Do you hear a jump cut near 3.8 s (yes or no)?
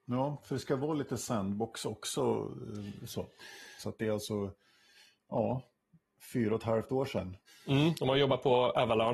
yes